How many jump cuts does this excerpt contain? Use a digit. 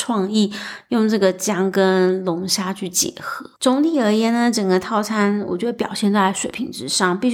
1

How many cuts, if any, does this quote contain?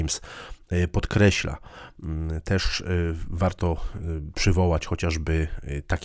0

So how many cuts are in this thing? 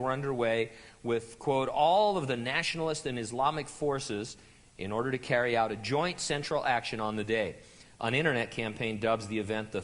1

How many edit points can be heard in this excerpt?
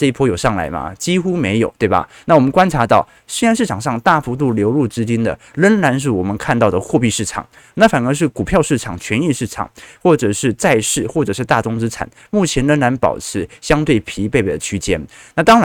0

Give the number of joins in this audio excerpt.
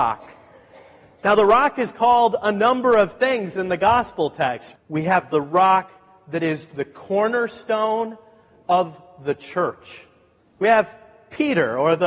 2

